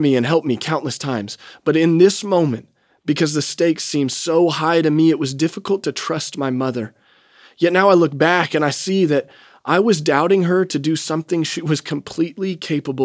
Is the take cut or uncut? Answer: uncut